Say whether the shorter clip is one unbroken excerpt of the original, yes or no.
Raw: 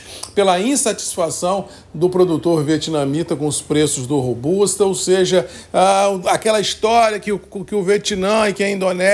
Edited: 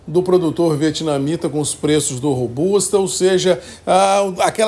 yes